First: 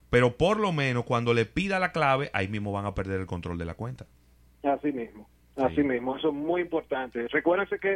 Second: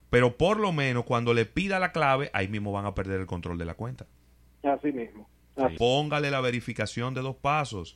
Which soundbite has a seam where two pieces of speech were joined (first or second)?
second